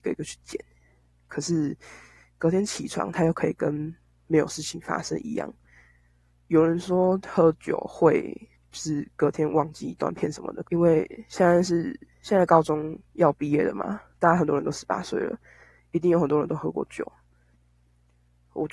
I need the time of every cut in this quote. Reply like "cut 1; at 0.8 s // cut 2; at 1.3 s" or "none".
cut 1; at 10.6 s